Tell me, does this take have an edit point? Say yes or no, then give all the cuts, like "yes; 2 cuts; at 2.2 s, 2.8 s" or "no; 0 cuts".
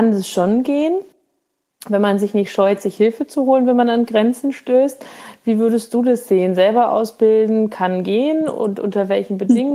no; 0 cuts